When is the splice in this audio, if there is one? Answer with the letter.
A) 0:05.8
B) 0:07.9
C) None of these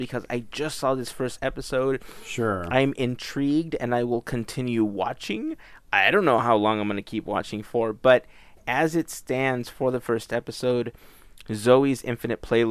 C